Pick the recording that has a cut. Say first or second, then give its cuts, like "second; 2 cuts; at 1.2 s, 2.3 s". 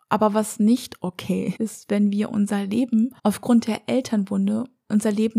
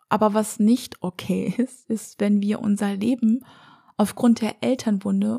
first; 2 cuts; at 1.6 s, 3.2 s